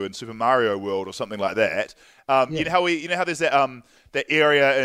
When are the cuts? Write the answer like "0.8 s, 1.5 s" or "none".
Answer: none